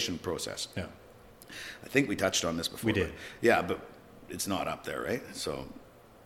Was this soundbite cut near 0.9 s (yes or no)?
no